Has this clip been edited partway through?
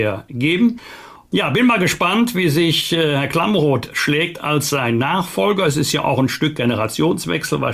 no; 0 cuts

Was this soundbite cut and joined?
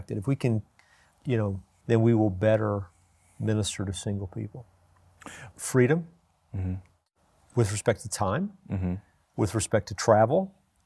yes; 2 cuts; at 1.8 s, 5.5 s

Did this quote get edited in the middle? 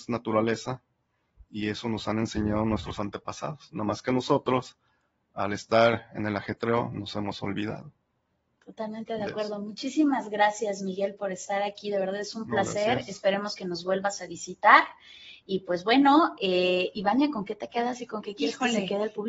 no; 0 cuts

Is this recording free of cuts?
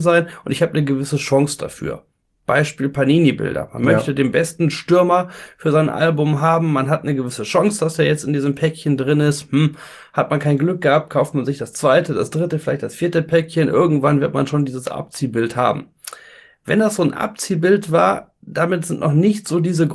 yes; 0 cuts

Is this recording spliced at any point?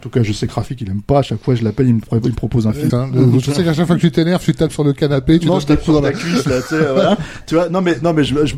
yes; 1 cut; at 2.9 s

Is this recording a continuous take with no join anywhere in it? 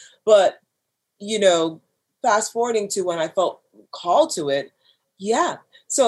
no; 1 cut; at 5.0 s

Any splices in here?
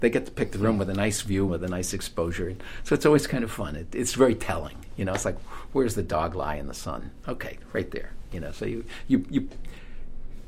yes; 1 cut; at 1.5 s

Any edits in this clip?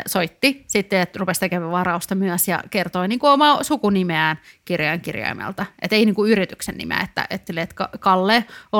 yes; 1 cut; at 7.5 s

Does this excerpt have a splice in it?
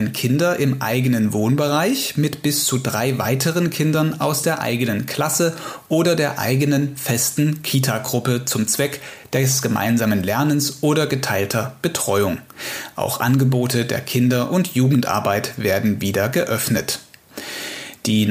no; 0 cuts

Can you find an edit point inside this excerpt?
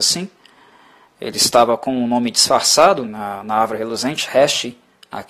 yes; 1 cut; at 3.0 s

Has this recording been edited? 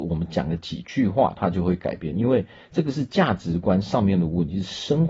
no; 0 cuts

